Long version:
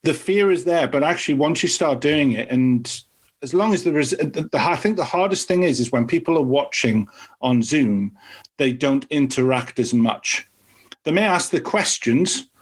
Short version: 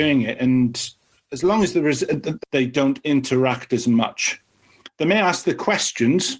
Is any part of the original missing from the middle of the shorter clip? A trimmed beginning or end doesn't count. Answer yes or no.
yes